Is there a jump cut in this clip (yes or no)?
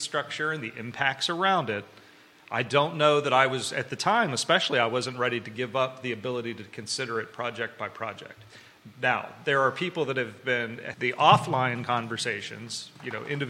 yes